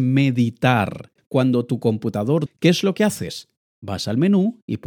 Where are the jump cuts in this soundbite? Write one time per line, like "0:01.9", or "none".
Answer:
0:01.2
0:02.5